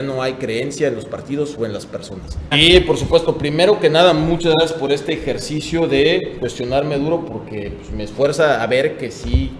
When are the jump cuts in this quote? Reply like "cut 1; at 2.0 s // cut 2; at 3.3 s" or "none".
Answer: cut 1; at 2.5 s